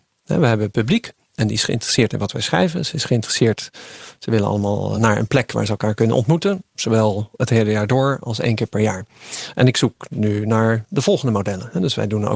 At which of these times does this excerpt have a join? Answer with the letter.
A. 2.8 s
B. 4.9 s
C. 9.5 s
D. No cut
B